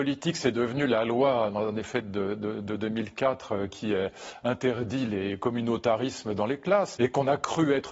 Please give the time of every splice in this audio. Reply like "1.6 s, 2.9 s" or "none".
7.0 s